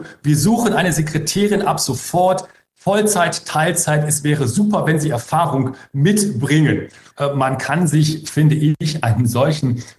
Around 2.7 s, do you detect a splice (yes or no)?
no